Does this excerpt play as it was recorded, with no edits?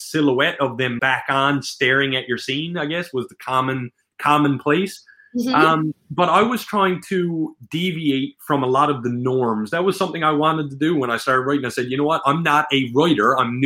no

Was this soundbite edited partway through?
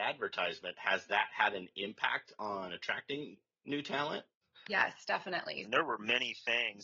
yes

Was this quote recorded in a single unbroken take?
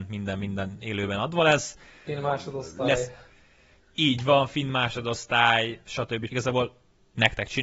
no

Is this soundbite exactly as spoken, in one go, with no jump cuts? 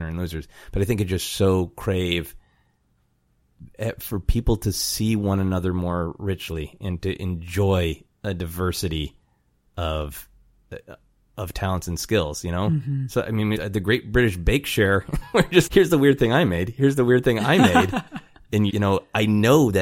no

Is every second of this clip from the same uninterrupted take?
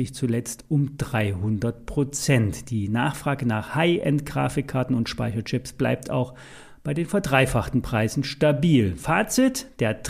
yes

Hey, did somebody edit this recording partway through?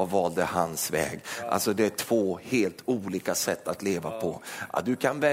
no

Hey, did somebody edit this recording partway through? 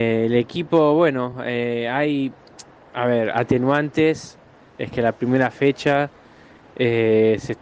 no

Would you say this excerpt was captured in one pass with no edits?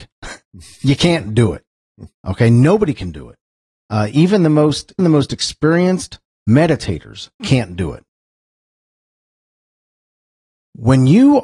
no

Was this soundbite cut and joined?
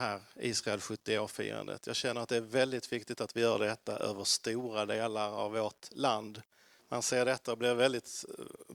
yes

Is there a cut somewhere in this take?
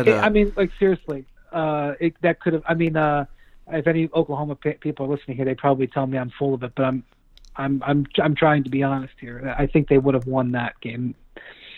no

